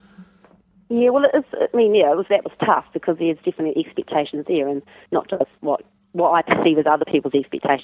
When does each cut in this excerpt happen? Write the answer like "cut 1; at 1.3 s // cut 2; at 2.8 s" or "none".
cut 1; at 2.3 s